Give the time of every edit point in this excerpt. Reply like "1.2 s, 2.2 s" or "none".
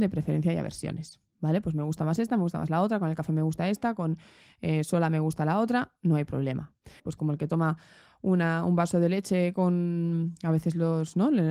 7.0 s